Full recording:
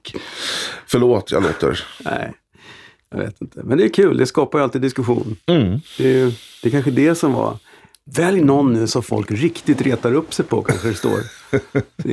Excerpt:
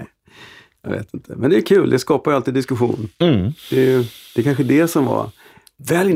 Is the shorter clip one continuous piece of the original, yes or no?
yes